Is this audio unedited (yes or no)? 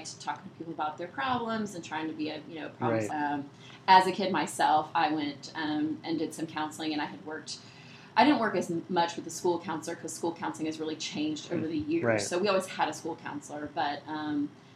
no